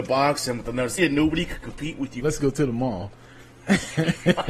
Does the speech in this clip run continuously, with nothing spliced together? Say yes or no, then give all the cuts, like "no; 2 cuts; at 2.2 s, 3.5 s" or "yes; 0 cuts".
no; 2 cuts; at 1.0 s, 2.2 s